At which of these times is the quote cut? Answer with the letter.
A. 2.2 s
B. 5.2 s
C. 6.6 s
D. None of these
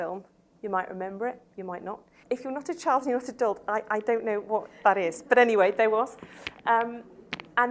A